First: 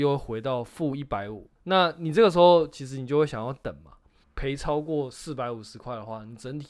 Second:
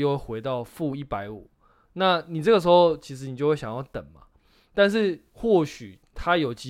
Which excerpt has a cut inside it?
first; 2 cuts; at 1.5 s, 4.2 s

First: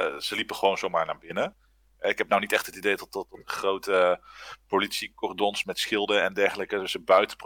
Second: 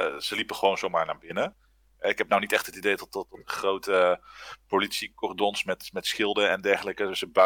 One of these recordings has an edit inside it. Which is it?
first; 1 cut; at 5.6 s

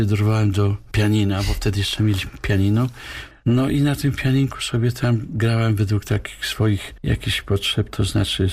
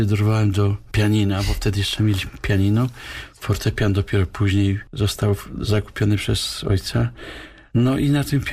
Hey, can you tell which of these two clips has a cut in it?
first; 1 cut; at 3.3 s

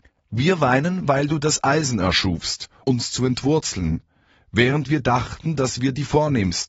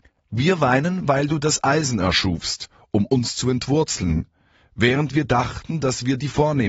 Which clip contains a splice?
first; 1 cut; at 2.8 s

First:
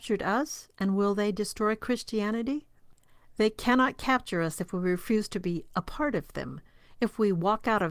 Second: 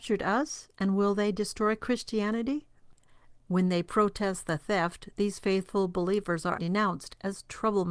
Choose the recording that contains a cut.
second; 2 cuts; at 3.3 s, 6.6 s

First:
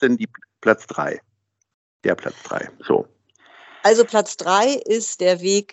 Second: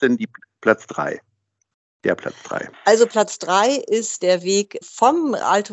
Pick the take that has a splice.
second; 2 cuts; at 2.7 s, 4.8 s

